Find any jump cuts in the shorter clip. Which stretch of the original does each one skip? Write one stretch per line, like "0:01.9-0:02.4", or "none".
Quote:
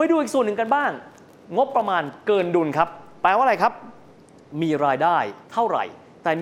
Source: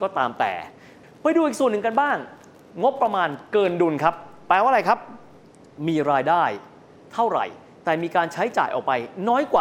0:06.7-0:07.1